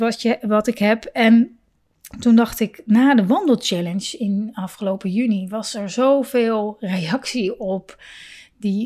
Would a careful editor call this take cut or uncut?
uncut